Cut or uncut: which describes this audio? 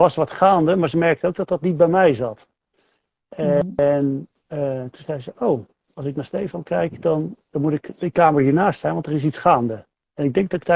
uncut